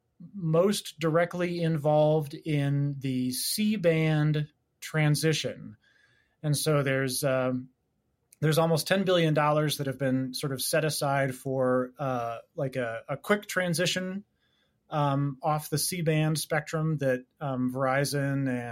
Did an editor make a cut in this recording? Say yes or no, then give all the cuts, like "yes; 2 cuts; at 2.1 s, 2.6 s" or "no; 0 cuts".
no; 0 cuts